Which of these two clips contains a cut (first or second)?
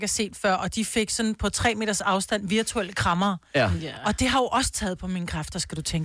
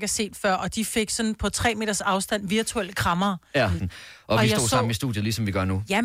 second